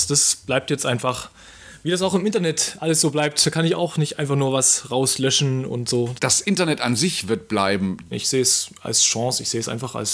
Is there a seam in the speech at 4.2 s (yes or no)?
no